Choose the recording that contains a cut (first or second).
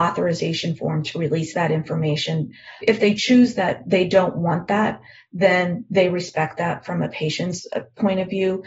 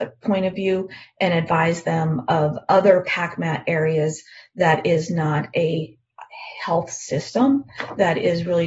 first